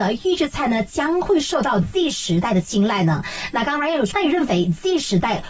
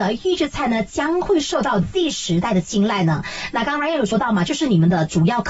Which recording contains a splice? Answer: first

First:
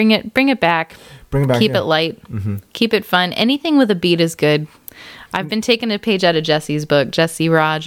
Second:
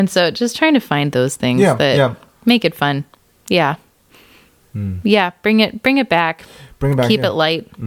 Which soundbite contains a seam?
first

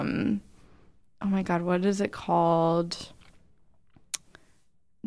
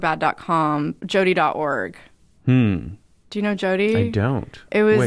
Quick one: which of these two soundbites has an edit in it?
second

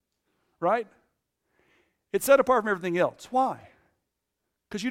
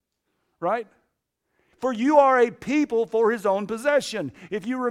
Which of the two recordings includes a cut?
second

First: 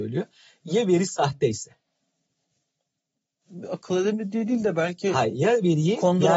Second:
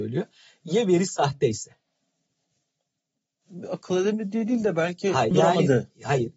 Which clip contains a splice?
second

